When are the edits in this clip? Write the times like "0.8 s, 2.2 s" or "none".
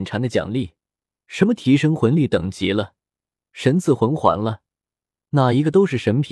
none